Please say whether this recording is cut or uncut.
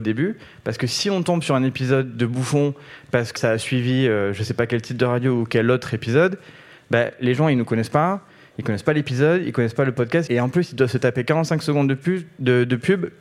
cut